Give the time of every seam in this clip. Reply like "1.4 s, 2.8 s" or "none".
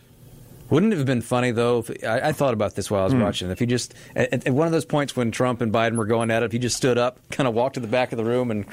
none